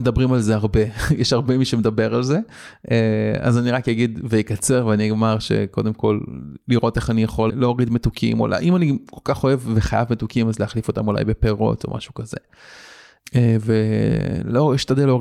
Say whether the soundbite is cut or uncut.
cut